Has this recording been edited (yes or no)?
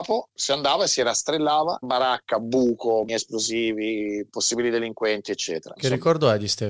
yes